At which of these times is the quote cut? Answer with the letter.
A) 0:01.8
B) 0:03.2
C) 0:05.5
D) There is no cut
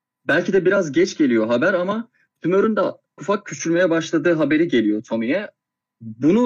B